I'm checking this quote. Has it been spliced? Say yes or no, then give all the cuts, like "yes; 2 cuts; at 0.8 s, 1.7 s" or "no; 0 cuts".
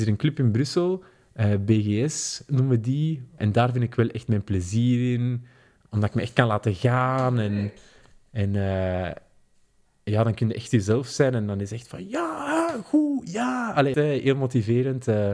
yes; 2 cuts; at 3.4 s, 13.9 s